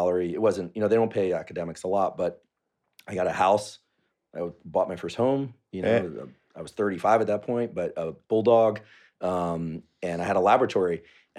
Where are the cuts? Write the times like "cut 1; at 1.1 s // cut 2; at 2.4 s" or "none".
none